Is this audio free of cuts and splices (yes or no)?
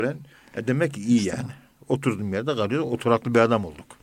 yes